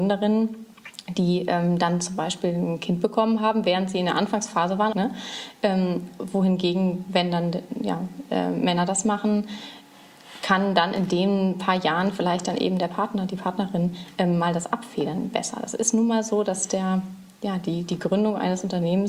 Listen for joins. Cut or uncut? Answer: cut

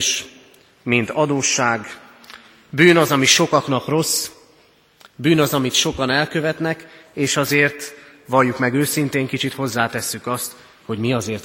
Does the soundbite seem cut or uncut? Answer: uncut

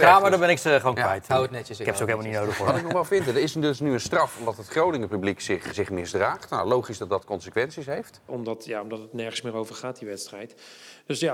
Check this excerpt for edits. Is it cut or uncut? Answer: cut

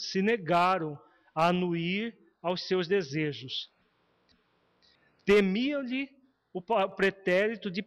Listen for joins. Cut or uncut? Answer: uncut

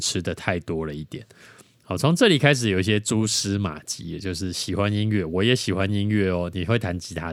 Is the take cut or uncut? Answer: uncut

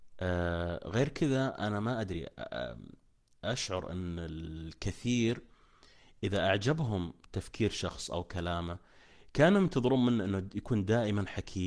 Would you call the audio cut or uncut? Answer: uncut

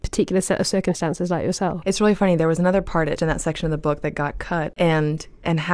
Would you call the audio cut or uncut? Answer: cut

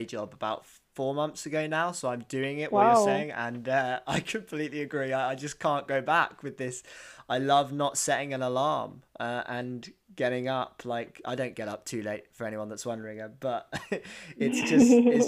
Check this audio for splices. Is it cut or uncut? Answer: uncut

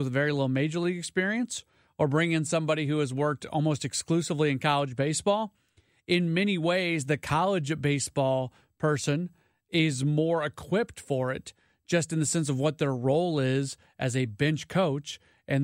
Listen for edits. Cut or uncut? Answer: uncut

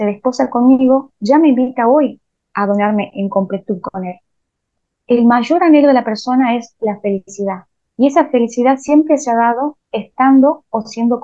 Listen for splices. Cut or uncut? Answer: uncut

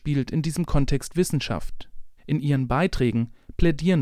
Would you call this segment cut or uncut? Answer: cut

